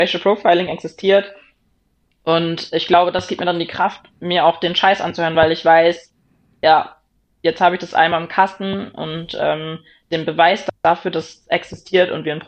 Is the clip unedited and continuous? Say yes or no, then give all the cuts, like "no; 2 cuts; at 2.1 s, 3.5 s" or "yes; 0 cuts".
yes; 0 cuts